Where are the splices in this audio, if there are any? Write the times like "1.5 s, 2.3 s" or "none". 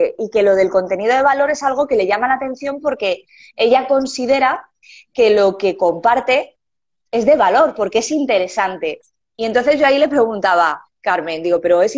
none